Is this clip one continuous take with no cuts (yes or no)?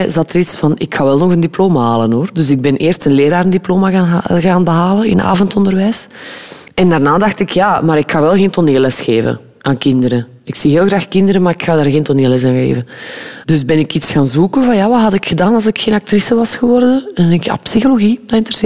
yes